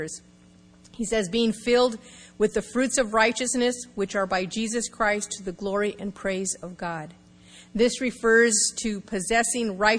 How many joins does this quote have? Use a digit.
0